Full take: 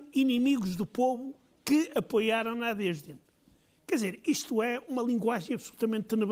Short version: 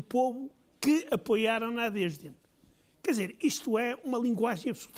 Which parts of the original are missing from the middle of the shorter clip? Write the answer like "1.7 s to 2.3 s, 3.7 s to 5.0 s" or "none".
none